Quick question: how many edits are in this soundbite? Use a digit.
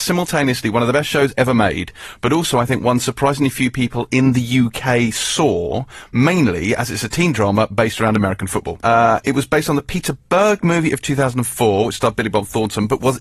1